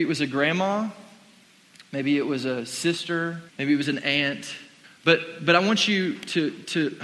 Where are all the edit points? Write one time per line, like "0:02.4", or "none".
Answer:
0:03.5
0:04.8